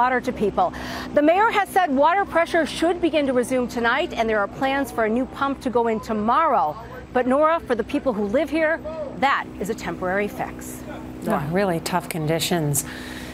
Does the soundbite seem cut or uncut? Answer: uncut